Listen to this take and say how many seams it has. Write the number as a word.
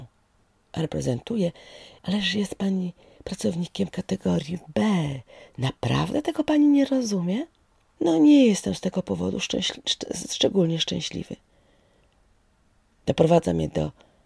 two